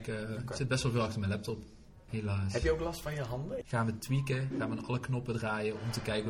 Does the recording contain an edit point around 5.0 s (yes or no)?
no